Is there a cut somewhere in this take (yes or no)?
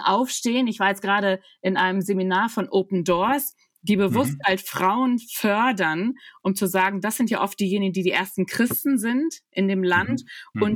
no